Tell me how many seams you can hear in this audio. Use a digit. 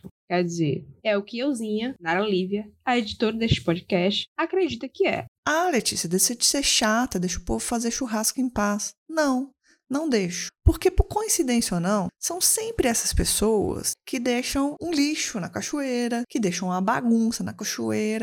1